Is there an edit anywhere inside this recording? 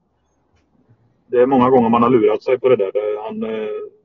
no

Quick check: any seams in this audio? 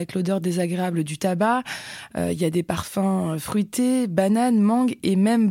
yes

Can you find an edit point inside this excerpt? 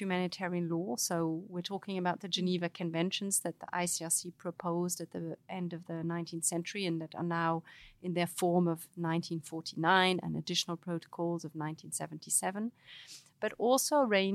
no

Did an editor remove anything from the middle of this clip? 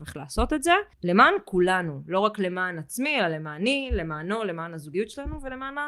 yes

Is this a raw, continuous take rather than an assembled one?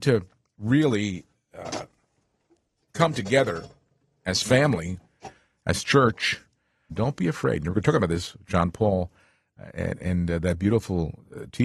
no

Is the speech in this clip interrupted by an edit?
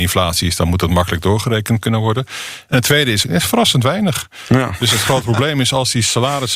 yes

